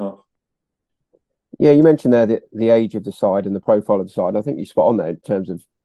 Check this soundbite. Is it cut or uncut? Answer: uncut